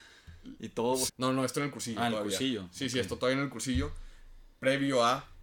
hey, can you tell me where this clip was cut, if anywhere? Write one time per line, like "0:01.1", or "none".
0:01.1